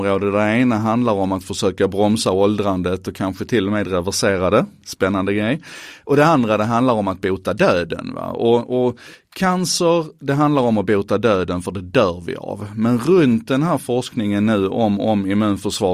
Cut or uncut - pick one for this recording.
uncut